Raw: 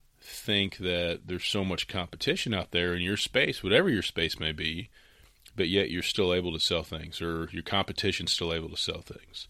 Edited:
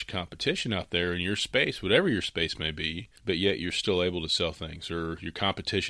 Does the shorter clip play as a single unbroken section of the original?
no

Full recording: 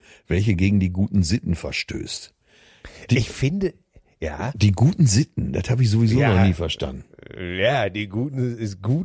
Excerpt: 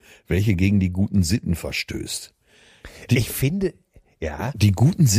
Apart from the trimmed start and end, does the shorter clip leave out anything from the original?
no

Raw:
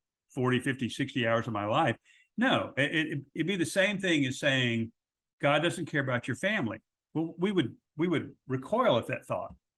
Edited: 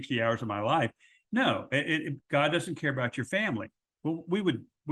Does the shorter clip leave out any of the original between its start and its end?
yes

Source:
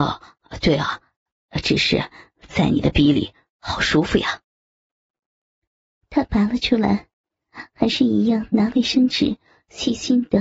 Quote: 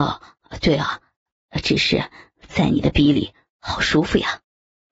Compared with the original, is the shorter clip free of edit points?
yes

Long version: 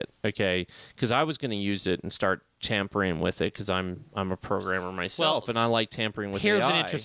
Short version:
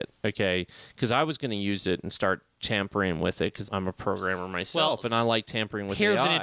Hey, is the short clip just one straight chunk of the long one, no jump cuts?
no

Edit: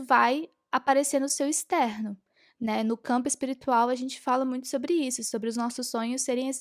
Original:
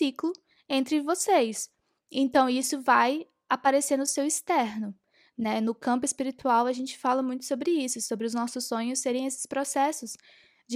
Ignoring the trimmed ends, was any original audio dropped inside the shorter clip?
no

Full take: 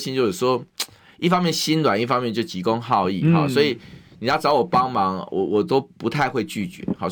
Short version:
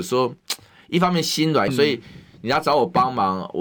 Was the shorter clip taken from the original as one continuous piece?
no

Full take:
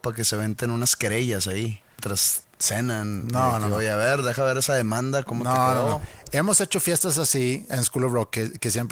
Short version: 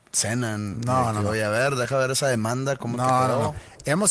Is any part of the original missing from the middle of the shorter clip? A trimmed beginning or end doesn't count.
no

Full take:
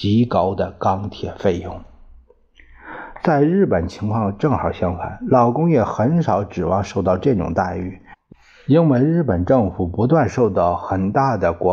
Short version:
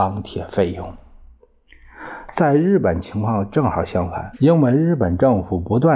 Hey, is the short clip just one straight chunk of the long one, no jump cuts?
no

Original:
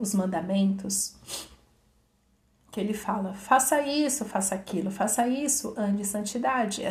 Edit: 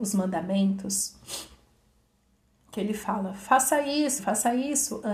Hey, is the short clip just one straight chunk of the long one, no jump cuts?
no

